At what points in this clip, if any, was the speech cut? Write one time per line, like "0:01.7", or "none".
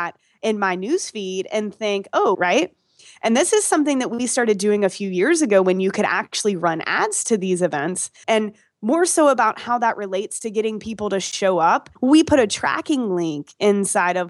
0:02.3
0:08.2
0:12.0